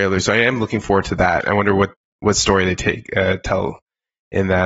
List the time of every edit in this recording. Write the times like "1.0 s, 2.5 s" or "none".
none